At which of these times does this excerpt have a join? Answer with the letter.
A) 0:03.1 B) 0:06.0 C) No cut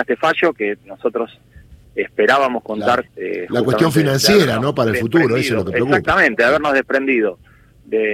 A